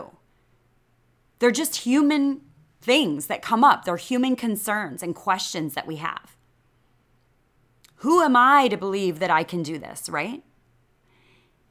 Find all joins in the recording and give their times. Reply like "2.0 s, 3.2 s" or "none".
none